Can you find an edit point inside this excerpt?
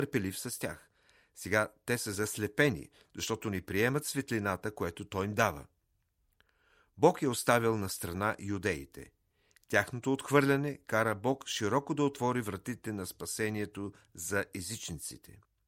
no; 0 cuts

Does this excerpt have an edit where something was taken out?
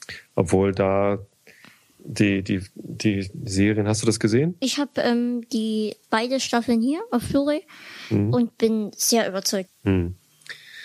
yes; 2 cuts; at 6.0 s, 9.7 s

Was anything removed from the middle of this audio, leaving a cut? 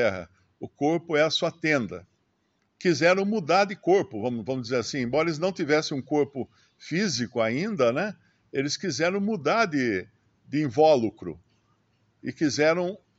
yes; 1 cut; at 2.6 s

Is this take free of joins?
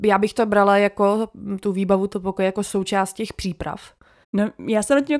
no; 1 cut; at 4.2 s

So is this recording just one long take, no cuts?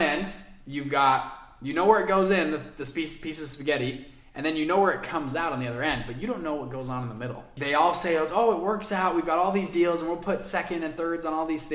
yes; 0 cuts

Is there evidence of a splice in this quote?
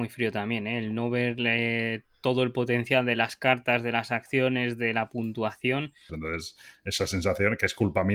yes; 1 cut; at 6.1 s

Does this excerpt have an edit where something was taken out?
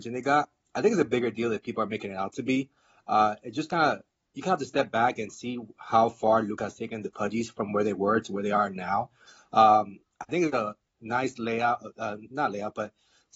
no; 0 cuts

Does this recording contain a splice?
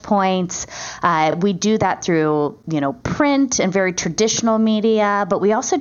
no; 0 cuts

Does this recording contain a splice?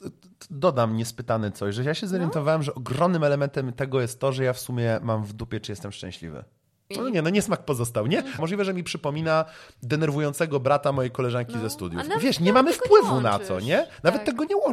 yes; 2 cuts; at 6.9 s, 8.4 s

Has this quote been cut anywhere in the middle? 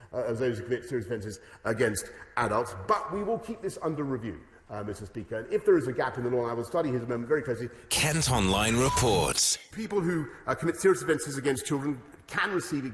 yes; 2 cuts; at 7.9 s, 9.7 s

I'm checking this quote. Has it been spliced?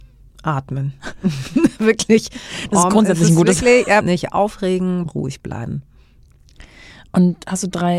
yes; 2 cuts; at 4.0 s, 5.1 s

